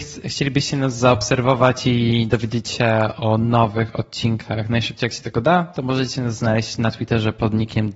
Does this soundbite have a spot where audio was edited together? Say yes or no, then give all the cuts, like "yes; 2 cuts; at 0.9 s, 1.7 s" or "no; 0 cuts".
no; 0 cuts